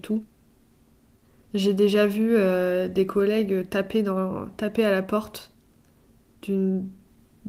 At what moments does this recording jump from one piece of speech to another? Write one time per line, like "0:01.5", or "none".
none